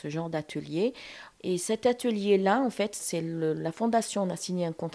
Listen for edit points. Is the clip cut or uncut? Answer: cut